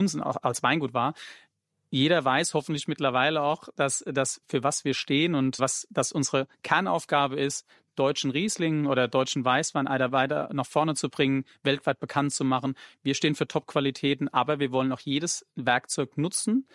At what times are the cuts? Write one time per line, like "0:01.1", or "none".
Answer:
0:05.6